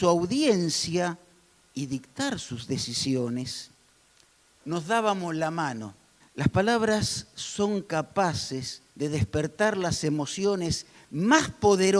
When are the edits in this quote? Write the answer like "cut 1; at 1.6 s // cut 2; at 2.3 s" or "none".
cut 1; at 4.6 s // cut 2; at 6.2 s // cut 3; at 8.9 s